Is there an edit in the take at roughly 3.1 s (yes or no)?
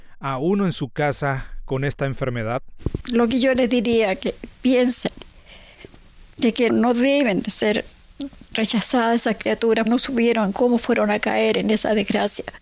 no